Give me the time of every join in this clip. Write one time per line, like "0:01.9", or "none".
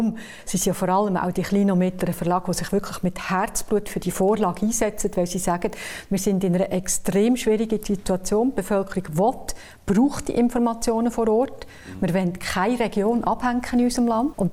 none